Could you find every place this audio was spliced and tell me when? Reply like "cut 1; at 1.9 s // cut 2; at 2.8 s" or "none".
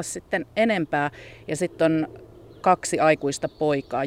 none